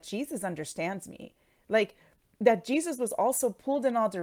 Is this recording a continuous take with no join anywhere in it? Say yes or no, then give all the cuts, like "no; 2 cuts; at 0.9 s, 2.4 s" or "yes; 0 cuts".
yes; 0 cuts